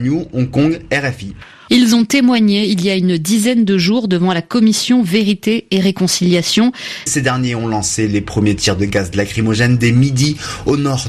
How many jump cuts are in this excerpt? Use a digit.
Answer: 2